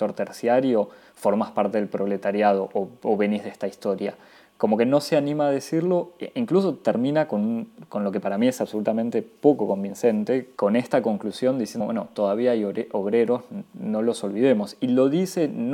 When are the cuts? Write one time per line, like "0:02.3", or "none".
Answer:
0:10.6
0:11.8